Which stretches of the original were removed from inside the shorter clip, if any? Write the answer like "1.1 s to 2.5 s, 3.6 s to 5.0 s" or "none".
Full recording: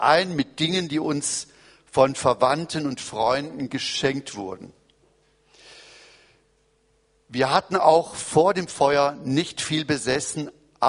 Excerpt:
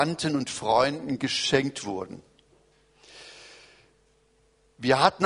none